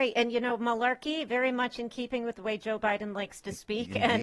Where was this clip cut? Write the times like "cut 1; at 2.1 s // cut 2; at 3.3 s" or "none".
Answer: none